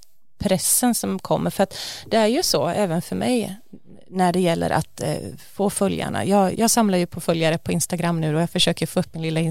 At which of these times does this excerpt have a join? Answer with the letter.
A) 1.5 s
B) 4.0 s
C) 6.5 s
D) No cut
C